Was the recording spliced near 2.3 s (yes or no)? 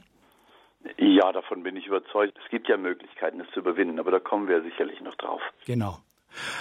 yes